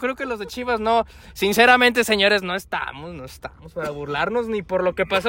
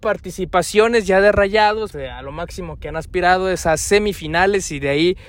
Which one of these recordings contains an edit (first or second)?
second